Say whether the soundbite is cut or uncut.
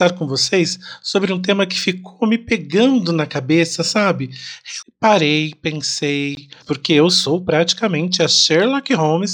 cut